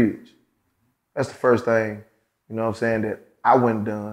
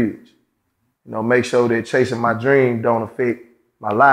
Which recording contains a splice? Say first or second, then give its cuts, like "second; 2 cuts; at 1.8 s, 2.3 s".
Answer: second; 1 cut; at 1.0 s